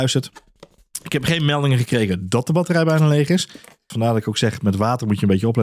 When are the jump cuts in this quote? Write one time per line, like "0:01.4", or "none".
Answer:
0:03.9